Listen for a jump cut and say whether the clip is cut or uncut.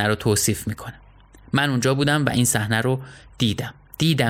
uncut